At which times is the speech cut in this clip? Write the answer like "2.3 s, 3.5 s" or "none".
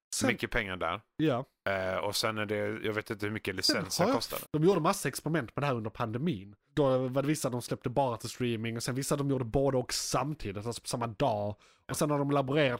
4.4 s